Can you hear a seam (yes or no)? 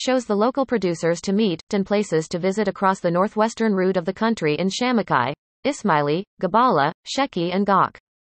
yes